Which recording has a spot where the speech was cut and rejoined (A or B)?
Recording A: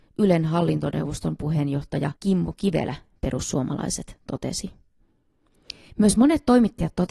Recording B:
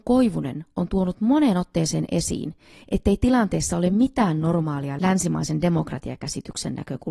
A